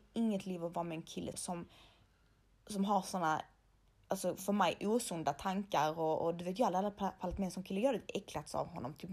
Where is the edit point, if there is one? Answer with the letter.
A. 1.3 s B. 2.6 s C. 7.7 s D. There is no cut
A